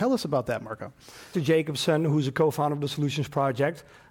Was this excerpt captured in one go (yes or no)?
no